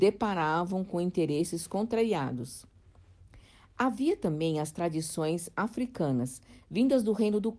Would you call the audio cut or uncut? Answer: uncut